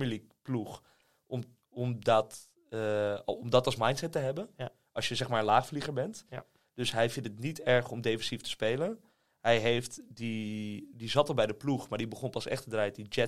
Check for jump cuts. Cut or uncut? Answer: uncut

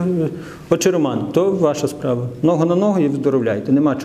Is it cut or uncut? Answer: uncut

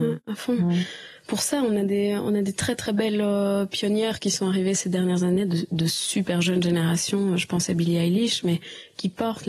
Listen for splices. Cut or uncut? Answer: uncut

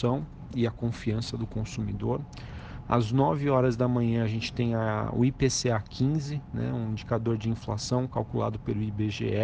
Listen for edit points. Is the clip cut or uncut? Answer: uncut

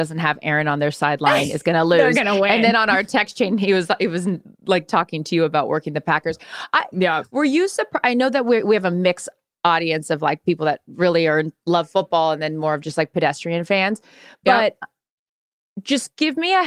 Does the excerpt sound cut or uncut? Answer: uncut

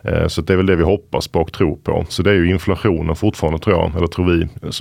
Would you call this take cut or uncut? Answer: cut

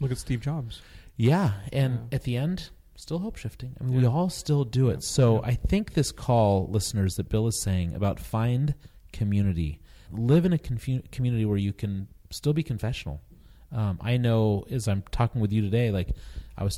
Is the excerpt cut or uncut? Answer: cut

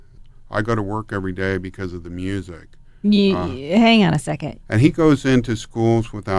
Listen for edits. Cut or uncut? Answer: cut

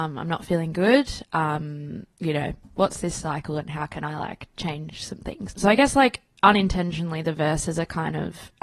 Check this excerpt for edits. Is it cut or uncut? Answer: cut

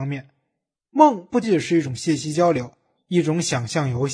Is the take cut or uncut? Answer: cut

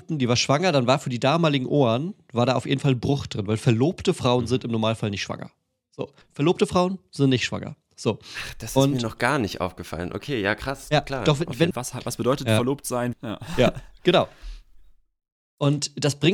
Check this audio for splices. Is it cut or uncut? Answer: cut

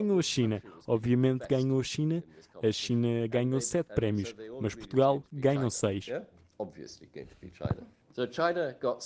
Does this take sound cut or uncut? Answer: cut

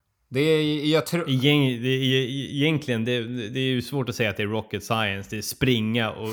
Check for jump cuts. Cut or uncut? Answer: uncut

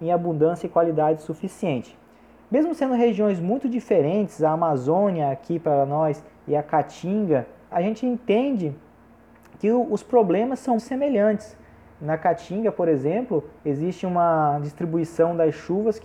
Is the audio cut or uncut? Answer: cut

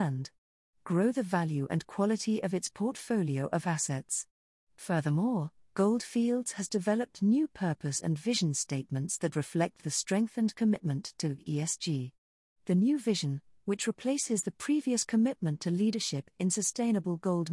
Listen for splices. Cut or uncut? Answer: uncut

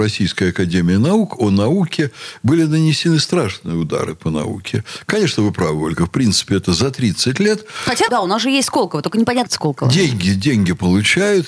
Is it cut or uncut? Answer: cut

